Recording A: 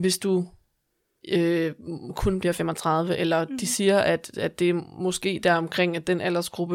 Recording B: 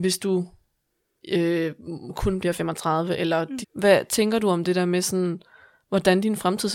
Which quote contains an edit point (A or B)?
B